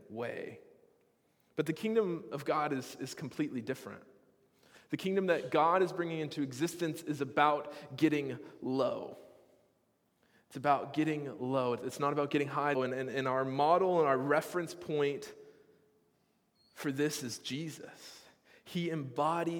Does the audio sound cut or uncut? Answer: cut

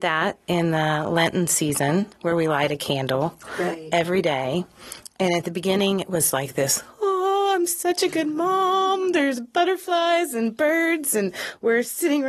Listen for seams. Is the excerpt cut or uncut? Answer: uncut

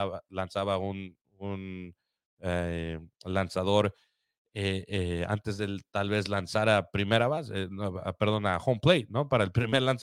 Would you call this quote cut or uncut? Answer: uncut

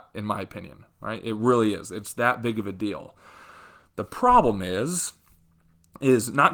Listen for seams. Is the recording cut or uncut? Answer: uncut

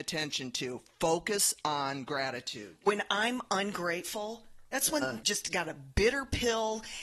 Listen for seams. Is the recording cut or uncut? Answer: cut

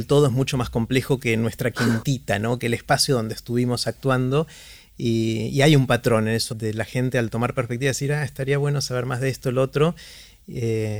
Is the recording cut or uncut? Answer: cut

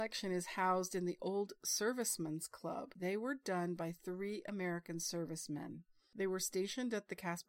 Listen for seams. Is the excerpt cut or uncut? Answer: cut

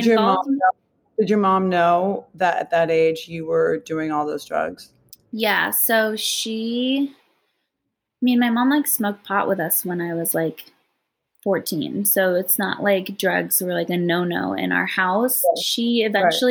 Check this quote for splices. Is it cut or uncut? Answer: uncut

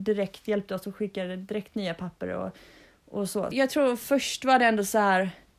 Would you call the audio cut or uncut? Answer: cut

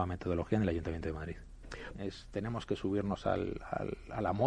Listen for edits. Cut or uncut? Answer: cut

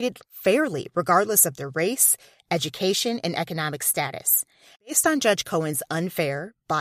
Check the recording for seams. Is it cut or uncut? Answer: cut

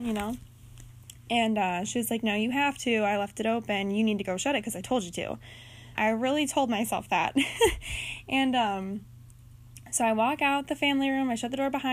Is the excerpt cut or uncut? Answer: cut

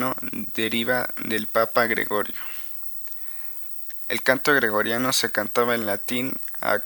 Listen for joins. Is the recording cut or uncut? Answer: uncut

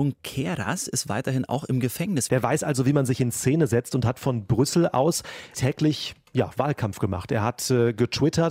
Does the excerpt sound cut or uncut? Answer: cut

